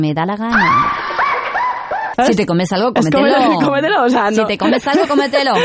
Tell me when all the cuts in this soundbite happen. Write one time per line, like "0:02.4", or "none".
0:02.1